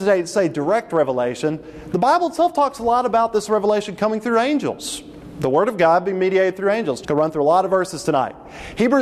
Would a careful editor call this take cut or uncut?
cut